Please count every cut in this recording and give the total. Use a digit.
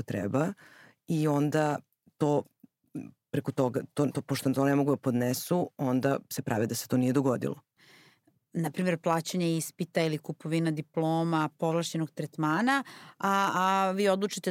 1